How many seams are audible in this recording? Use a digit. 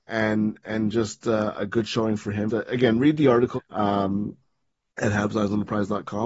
2